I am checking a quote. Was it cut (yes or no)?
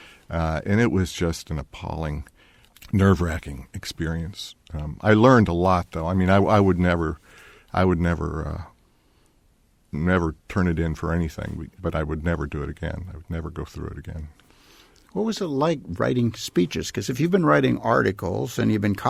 yes